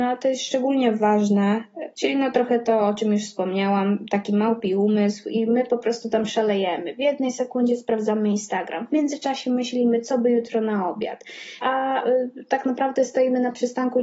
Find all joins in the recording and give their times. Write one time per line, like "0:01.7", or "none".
0:01.9
0:11.6

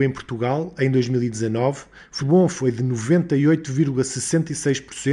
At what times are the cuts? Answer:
0:02.2

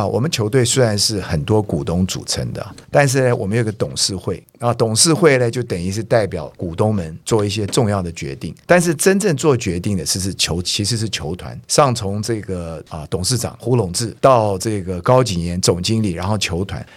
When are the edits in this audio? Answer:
none

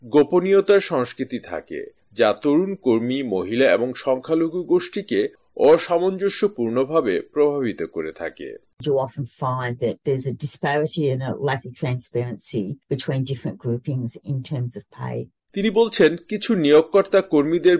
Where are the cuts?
0:15.5

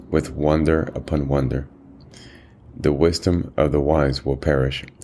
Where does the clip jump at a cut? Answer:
none

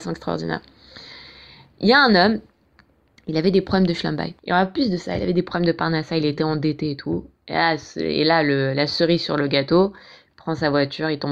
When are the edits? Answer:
0:04.4

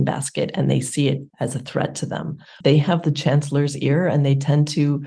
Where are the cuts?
0:01.3
0:02.6

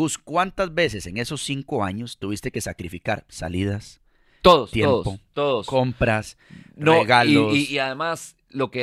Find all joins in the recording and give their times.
none

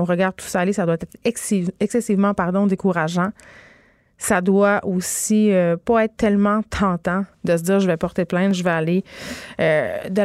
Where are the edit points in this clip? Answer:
0:07.3

